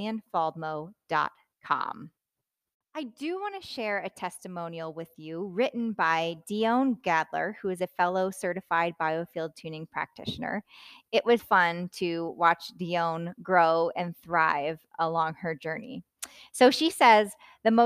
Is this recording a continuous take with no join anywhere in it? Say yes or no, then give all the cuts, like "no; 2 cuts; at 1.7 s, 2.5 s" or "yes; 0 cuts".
no; 1 cut; at 11.4 s